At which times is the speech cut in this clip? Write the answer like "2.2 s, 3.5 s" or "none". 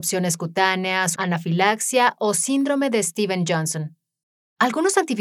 1.1 s